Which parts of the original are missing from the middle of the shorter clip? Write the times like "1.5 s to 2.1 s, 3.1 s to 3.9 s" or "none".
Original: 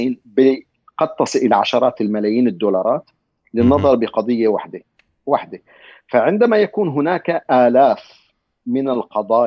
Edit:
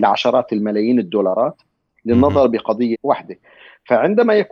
4.4 s to 5.2 s